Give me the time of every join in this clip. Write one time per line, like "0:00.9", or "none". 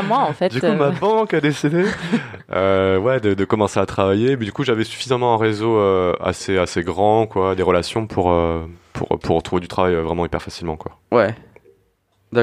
none

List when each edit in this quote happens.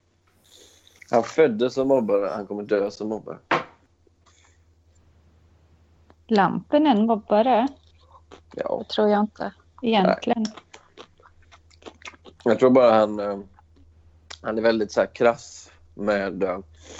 none

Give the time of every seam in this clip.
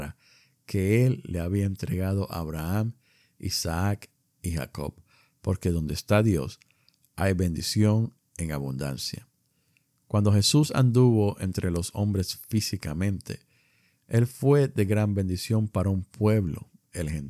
none

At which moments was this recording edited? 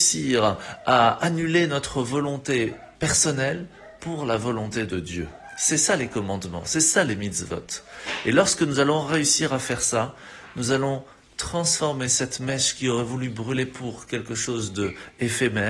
0:03.0

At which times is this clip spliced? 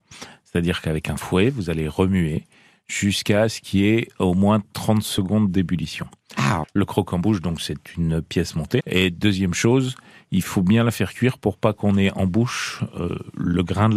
0:06.6
0:08.8

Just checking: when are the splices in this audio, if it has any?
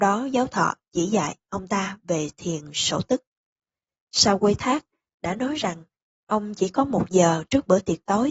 none

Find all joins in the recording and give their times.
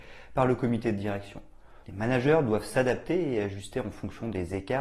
0:01.8

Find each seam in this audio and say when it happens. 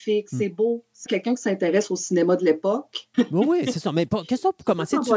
0:01.1
0:03.1

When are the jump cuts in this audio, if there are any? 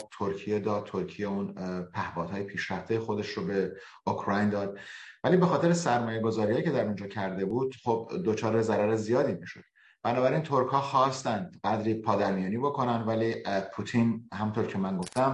none

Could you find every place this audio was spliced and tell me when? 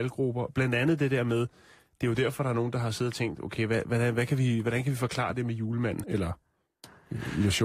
0:06.0

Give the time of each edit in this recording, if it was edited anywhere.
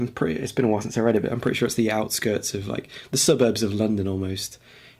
none

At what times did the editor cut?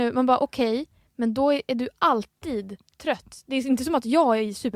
none

